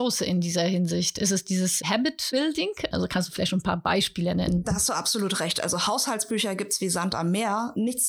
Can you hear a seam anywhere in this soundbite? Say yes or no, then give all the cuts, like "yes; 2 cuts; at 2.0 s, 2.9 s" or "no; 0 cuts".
yes; 1 cut; at 2.9 s